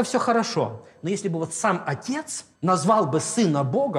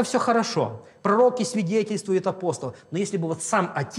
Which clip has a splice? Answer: first; 2 cuts; at 1.0 s, 2.5 s

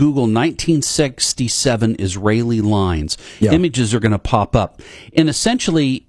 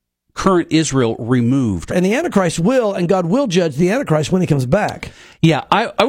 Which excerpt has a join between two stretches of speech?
second; 1 cut; at 1.9 s

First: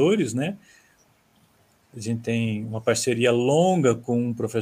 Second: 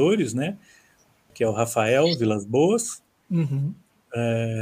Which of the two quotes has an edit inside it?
second; 1 cut; at 1.3 s

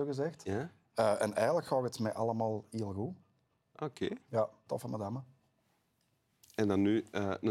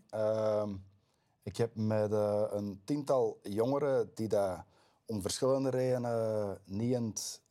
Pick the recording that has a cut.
first; 1 cut; at 4.7 s

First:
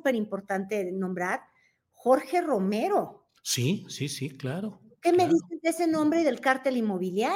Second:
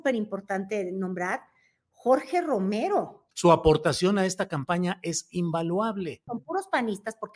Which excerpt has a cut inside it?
second; 2 cuts; at 3.3 s, 6.3 s

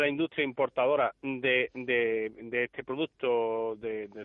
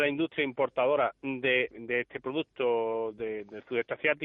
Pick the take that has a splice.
second; 1 cut; at 1.7 s

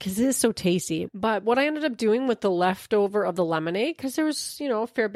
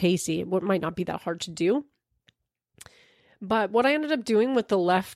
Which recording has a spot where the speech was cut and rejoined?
first; 1 cut; at 1.1 s

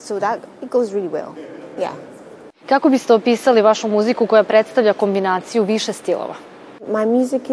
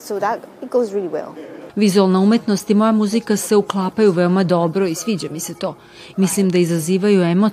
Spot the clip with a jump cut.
second; 2 cuts; at 1.7 s, 6.1 s

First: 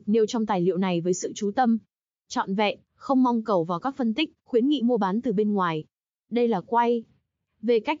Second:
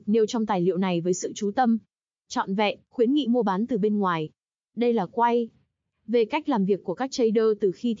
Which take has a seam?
second; 1 cut; at 2.9 s

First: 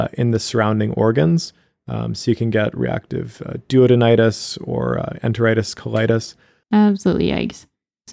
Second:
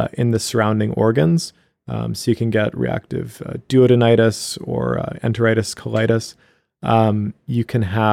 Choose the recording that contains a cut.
first; 1 cut; at 6.6 s

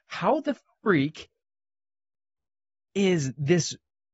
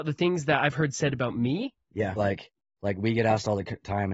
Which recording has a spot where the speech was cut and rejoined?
second; 1 cut; at 2.2 s

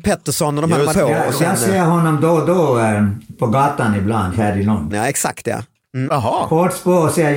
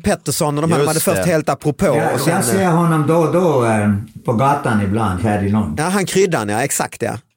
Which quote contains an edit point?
first; 3 cuts; at 0.9 s, 4.9 s, 6.1 s

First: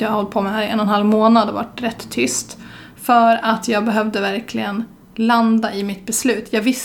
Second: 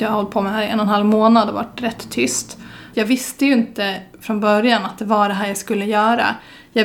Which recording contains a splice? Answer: second; 1 cut; at 2.9 s

